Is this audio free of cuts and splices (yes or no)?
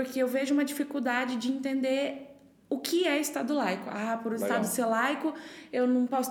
yes